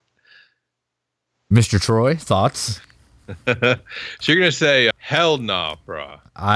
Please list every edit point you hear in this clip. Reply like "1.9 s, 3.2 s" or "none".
3.2 s, 4.9 s